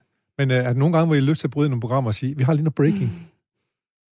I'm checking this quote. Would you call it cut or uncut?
uncut